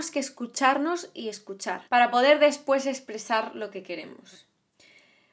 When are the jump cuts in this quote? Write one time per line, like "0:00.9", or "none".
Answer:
0:01.9